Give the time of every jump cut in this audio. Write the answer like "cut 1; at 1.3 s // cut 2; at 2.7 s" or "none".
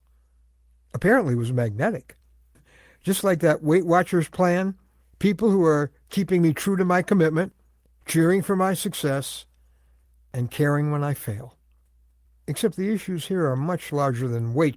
cut 1; at 2.5 s